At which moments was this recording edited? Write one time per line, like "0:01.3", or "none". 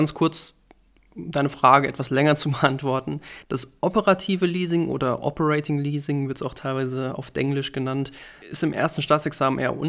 0:03.4
0:08.4

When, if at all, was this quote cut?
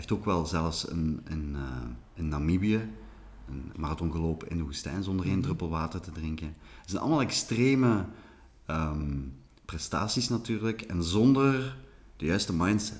0:03.7

